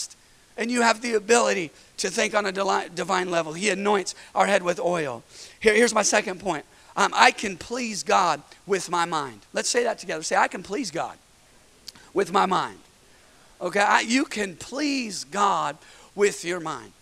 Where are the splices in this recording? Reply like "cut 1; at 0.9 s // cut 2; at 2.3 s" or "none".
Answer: none